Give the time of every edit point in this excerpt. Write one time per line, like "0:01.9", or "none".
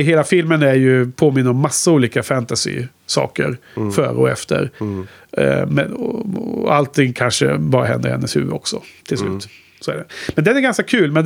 none